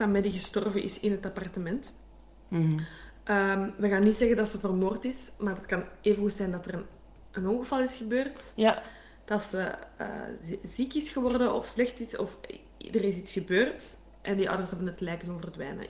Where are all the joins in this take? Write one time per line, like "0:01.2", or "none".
none